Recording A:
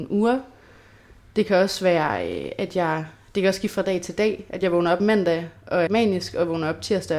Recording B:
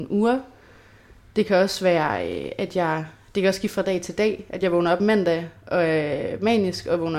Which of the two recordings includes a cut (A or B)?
A